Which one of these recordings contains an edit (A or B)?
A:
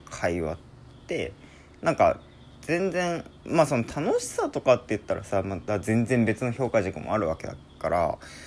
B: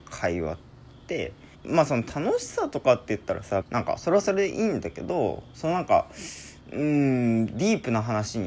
B